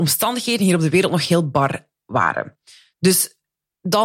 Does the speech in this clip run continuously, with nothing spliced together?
yes; 0 cuts

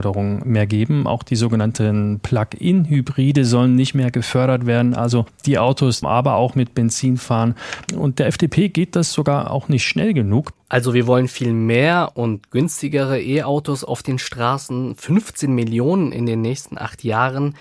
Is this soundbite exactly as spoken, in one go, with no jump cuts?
no; 2 cuts; at 6.0 s, 10.5 s

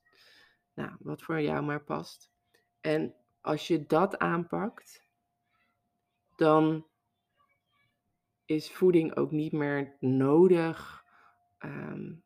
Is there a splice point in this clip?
no; 0 cuts

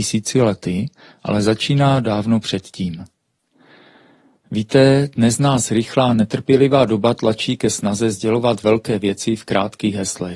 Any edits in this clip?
no; 0 cuts

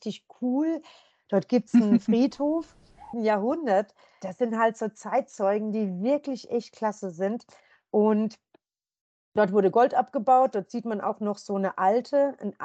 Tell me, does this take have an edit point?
yes; 1 cut; at 3.1 s

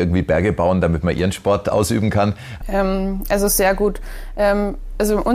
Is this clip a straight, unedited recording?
no; 1 cut; at 2.6 s

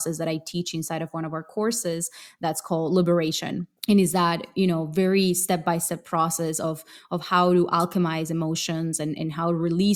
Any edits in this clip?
yes; 1 cut; at 3.8 s

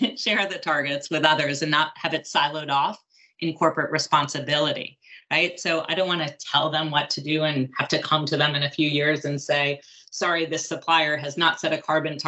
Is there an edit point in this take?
no; 0 cuts

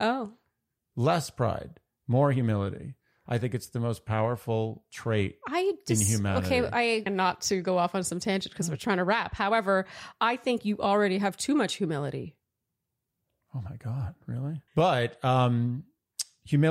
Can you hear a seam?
yes; 2 cuts; at 7.1 s, 14.7 s

